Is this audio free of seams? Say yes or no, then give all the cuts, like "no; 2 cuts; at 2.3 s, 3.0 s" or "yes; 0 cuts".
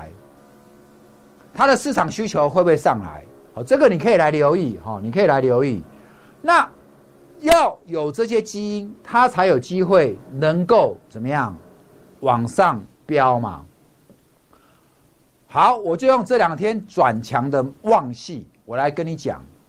yes; 0 cuts